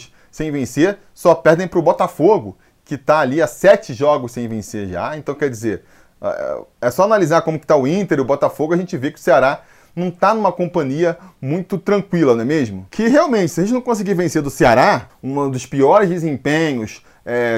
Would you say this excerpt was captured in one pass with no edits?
no; 2 cuts; at 12.9 s, 15.1 s

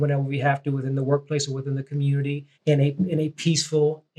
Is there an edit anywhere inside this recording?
yes; 1 cut; at 2.5 s

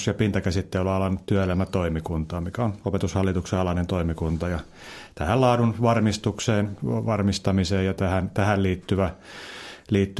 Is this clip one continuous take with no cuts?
yes; 0 cuts

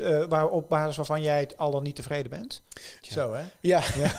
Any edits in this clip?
yes; 1 cut; at 3.0 s

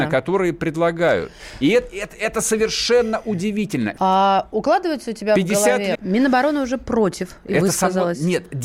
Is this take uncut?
no; 2 cuts; at 4.0 s, 5.9 s

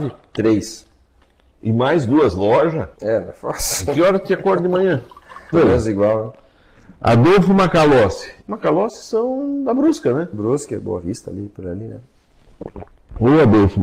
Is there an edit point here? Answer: yes; 3 cuts; at 2.9 s, 5.5 s, 8.4 s

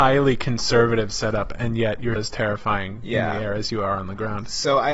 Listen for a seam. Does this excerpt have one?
yes; 1 cut; at 2.2 s

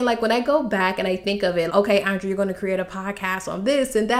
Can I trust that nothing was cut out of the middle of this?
no; 1 cut; at 1.7 s

